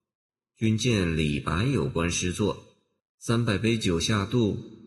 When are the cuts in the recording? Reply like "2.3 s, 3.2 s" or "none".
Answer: 3.0 s